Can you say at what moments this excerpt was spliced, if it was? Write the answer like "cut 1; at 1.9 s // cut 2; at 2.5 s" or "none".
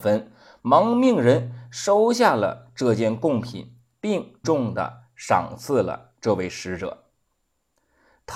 cut 1; at 4.4 s